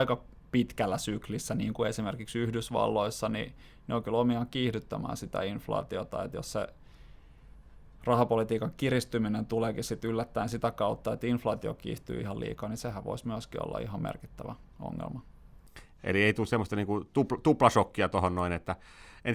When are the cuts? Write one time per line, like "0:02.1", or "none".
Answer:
0:16.0